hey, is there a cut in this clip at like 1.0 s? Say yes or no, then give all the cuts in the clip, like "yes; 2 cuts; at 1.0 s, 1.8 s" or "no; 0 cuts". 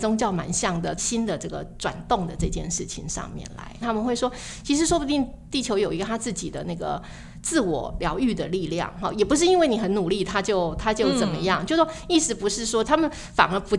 yes; 3 cuts; at 1.0 s, 3.8 s, 12.8 s